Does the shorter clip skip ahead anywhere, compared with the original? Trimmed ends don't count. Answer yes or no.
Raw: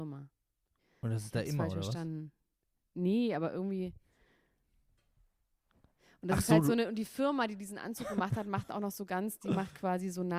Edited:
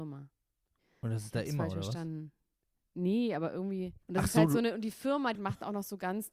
yes